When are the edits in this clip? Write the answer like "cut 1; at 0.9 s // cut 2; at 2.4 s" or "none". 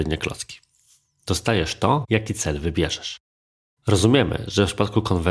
cut 1; at 1.2 s